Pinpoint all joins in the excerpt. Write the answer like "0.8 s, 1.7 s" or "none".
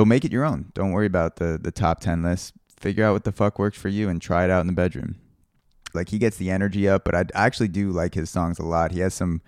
5.9 s